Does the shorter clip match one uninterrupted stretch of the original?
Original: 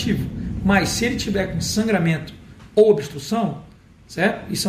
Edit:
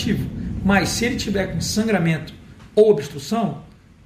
yes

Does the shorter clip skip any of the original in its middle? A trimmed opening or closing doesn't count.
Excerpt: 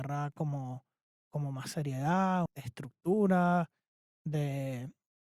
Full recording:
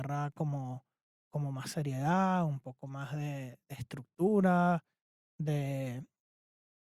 yes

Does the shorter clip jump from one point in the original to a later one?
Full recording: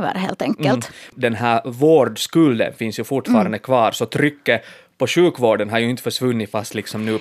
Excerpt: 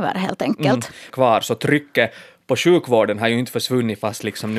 yes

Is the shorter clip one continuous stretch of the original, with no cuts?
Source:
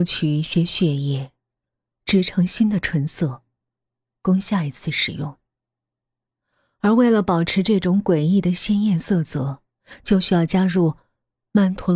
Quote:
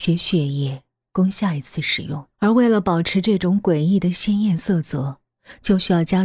no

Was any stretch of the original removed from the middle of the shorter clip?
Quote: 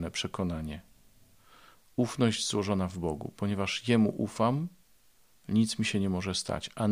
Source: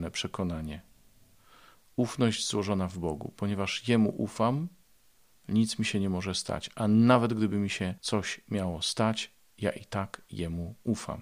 no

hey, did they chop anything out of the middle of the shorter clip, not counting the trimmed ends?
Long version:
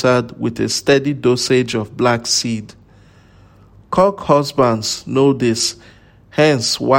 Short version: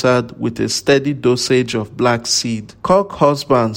yes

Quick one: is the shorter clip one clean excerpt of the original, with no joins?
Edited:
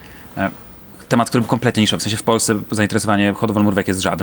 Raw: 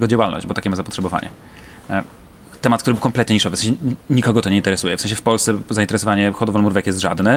no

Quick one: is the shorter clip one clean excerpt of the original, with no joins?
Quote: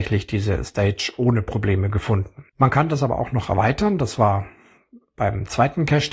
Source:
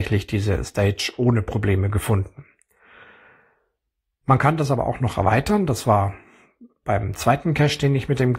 no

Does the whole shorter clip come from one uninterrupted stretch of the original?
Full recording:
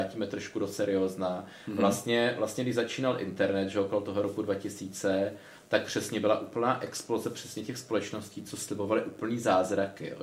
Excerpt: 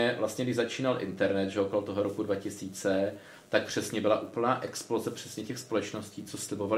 yes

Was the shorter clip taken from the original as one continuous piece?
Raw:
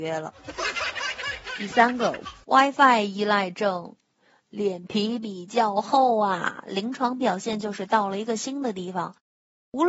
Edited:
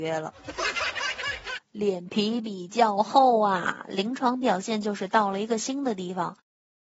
no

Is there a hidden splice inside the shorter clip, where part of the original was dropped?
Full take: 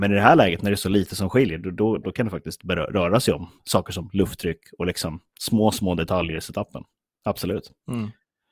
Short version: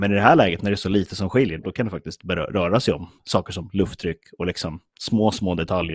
yes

